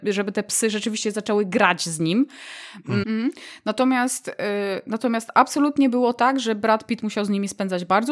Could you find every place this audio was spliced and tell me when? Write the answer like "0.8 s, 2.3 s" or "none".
3.0 s